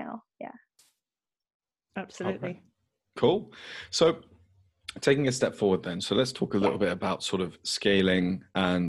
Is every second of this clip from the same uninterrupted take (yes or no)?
yes